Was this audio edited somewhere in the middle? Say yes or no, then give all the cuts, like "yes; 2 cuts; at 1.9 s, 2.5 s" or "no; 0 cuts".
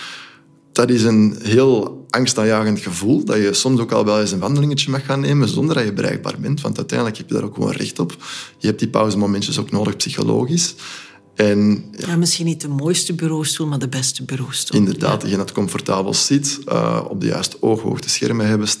yes; 1 cut; at 12.0 s